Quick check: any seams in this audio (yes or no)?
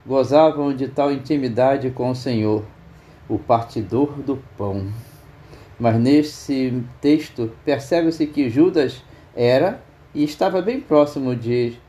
no